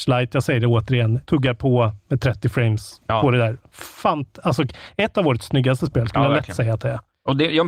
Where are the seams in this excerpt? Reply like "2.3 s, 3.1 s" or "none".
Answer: 1.2 s